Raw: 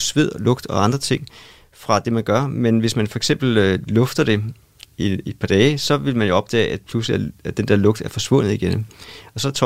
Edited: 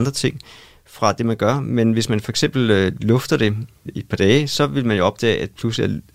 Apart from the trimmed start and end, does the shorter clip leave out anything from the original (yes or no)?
yes